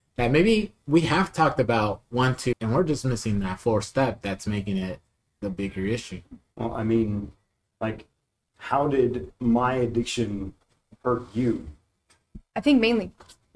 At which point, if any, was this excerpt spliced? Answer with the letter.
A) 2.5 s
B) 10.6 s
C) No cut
A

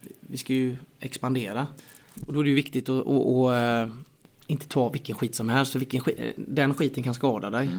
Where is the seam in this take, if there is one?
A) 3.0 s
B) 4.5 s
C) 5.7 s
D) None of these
D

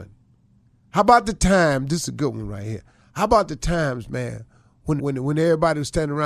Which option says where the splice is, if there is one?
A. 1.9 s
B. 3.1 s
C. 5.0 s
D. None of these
C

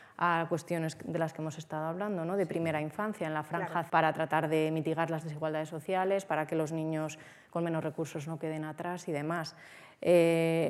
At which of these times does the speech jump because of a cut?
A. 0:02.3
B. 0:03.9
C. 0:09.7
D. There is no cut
B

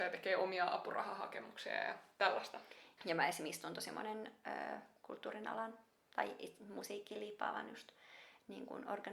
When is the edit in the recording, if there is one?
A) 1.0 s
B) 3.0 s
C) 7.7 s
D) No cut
B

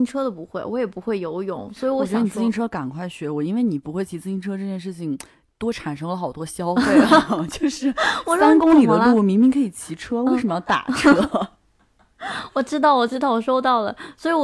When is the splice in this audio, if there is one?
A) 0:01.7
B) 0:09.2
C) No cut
C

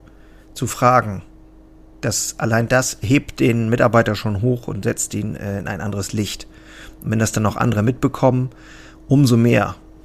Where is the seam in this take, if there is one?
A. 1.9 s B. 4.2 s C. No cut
C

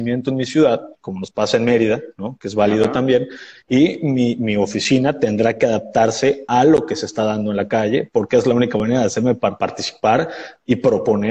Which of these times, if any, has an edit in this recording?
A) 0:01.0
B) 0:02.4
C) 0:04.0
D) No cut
D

